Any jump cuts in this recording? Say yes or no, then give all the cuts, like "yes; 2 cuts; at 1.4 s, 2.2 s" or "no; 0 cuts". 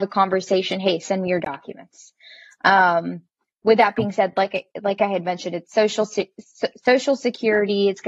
no; 0 cuts